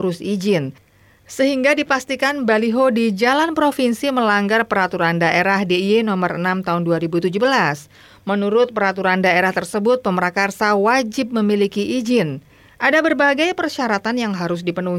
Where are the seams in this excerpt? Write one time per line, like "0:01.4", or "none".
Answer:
none